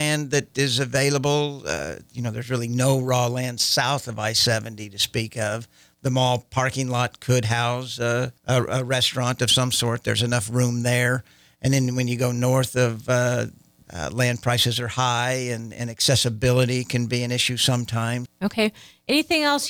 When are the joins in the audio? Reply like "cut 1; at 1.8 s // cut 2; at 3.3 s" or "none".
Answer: cut 1; at 8.4 s // cut 2; at 13.8 s // cut 3; at 18.3 s